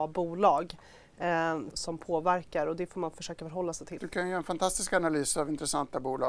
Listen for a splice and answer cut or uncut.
cut